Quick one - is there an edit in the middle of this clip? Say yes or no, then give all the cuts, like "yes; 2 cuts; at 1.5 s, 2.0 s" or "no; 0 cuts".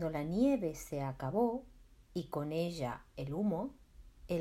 no; 0 cuts